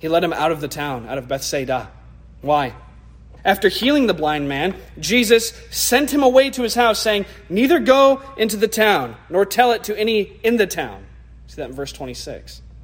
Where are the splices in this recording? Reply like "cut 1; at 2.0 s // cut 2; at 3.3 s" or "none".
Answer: cut 1; at 3.4 s